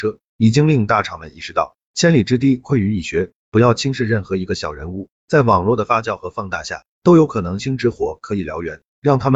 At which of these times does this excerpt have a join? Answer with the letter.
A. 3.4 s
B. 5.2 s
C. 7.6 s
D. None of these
C